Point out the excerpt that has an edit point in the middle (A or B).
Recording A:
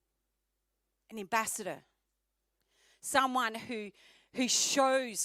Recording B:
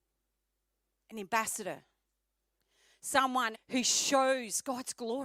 B